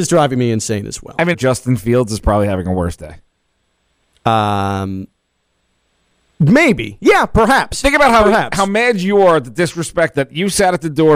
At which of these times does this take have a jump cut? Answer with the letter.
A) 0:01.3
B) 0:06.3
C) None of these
A